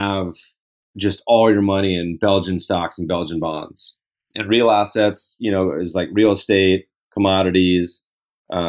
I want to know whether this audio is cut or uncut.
cut